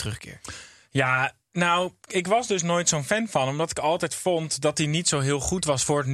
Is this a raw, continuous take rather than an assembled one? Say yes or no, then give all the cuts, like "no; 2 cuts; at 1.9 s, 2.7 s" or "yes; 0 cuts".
yes; 0 cuts